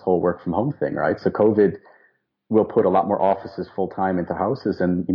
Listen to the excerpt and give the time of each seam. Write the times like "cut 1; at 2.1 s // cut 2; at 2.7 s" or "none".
none